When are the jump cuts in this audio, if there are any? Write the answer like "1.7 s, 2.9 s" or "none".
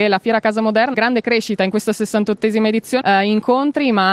0.9 s, 3.0 s

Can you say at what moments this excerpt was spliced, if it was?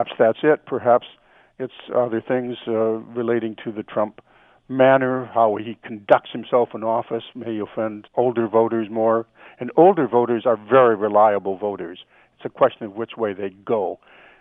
8.1 s

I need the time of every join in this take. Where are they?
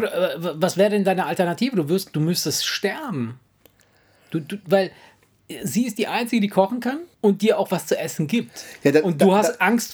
7.1 s

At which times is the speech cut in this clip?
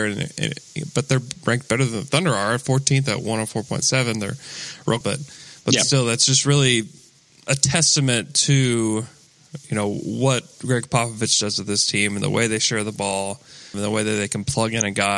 5.0 s, 13.7 s

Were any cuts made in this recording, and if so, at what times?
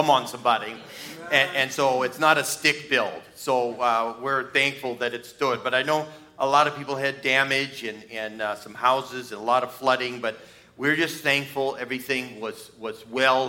none

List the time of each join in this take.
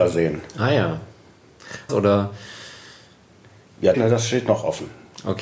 1.9 s, 3.9 s

